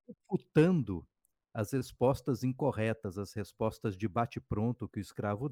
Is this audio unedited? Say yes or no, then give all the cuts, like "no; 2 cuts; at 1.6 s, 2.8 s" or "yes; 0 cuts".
yes; 0 cuts